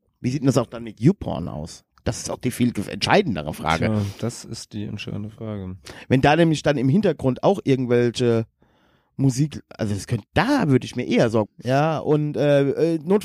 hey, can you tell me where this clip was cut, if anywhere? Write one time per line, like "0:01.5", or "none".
0:11.5